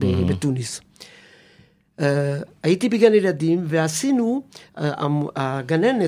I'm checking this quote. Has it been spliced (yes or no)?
no